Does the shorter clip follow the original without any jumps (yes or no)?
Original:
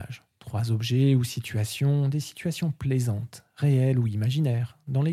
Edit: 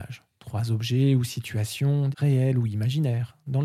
no